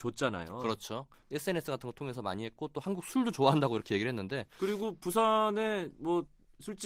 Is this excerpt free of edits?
no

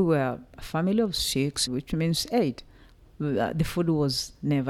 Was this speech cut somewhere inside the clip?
yes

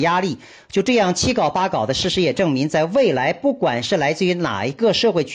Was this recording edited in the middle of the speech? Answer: no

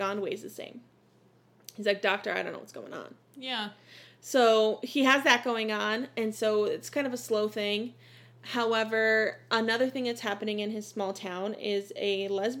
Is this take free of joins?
yes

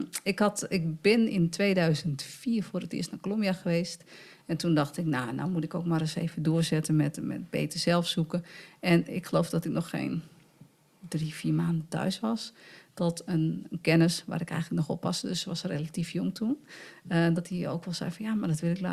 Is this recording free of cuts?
yes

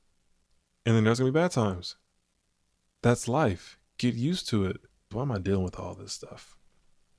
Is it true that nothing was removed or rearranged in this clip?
no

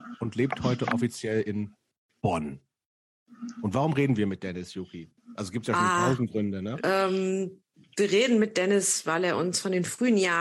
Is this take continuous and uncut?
no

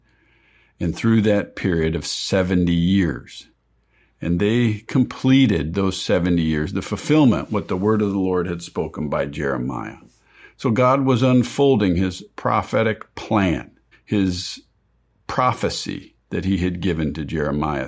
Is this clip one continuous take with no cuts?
no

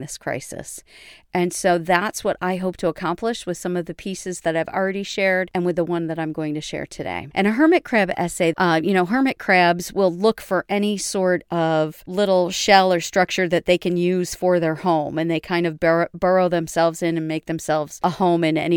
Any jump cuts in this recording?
yes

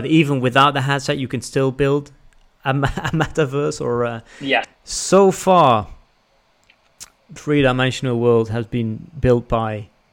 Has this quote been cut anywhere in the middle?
yes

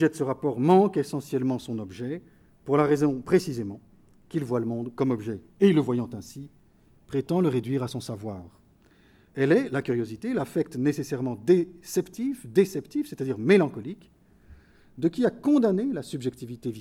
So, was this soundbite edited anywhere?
yes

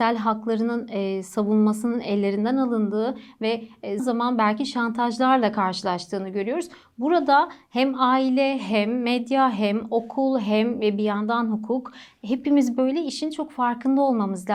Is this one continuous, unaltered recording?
no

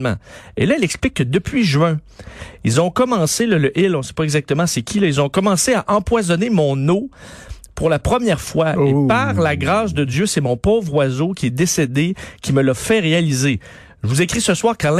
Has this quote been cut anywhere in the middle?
no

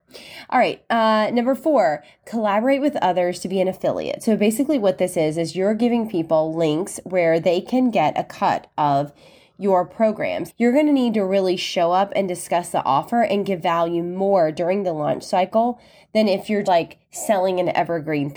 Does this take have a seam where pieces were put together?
yes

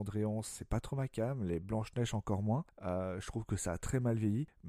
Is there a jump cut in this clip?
no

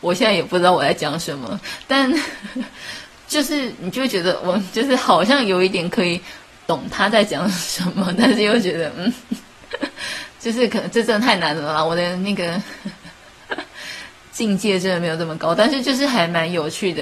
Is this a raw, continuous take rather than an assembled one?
yes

